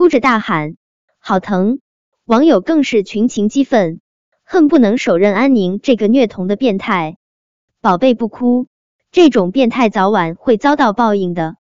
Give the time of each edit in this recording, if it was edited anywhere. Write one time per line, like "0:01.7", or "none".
none